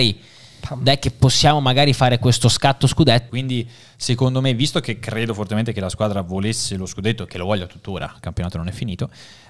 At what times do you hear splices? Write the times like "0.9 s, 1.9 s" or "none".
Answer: 3.3 s